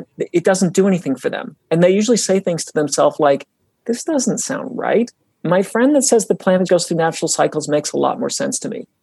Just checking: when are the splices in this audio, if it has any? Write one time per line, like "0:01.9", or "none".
0:06.7